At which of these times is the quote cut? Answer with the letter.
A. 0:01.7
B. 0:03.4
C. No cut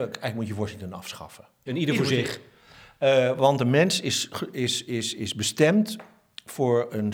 A